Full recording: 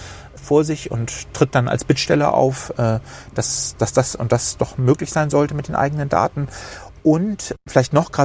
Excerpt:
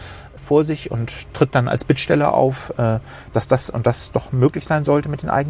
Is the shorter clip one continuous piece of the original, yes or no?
no